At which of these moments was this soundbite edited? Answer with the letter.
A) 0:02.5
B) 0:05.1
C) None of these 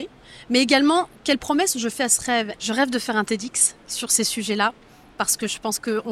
A